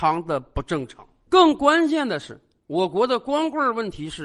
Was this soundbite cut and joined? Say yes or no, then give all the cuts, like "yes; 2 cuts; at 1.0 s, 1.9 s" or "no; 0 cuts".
no; 0 cuts